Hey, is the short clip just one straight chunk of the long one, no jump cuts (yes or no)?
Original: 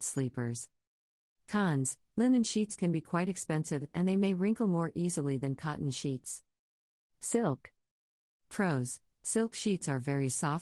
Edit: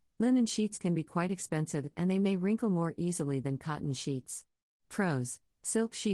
no